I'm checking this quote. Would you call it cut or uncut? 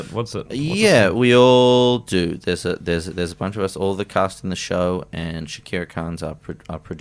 uncut